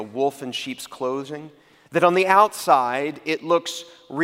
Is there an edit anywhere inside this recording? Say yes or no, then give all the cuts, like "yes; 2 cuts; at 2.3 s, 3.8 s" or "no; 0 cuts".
yes; 1 cut; at 1.9 s